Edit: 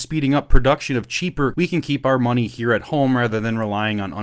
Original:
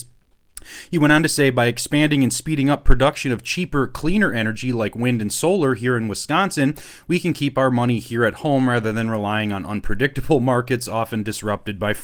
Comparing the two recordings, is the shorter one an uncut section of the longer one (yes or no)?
no